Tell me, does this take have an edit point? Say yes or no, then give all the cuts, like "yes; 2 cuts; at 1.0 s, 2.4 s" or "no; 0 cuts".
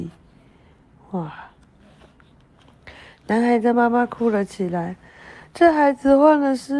no; 0 cuts